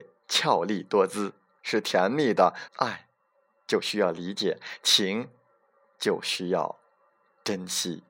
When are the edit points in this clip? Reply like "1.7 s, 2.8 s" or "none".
1.6 s, 2.7 s